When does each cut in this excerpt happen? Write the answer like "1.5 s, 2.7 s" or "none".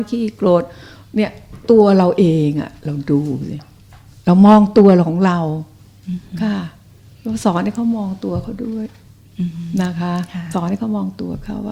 none